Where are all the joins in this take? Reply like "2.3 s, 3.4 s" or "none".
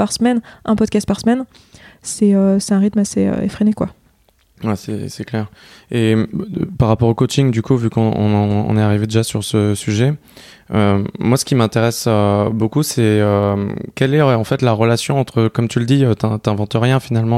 none